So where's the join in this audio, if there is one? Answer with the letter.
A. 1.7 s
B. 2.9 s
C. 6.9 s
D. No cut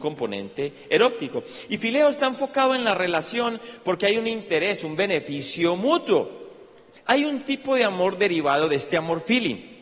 C